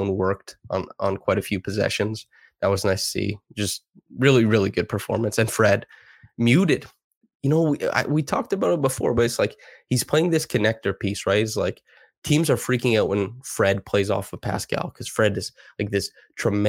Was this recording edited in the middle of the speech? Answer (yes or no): no